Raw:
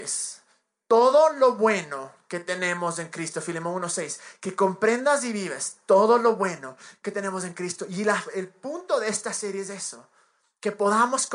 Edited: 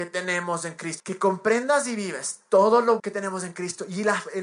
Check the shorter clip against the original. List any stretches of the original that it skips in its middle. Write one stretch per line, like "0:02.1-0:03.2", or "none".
0:03.3-0:04.4
0:06.4-0:07.0